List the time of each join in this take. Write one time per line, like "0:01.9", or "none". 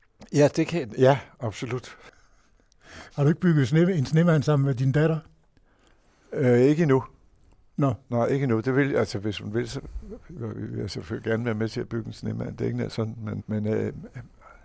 0:03.1
0:13.4